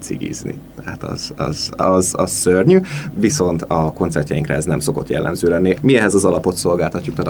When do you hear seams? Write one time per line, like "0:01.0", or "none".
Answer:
0:01.8
0:05.7